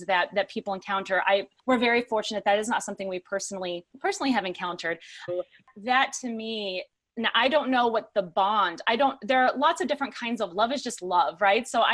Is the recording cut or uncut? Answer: cut